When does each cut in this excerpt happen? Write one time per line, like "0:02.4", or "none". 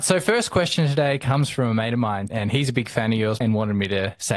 0:02.3
0:03.4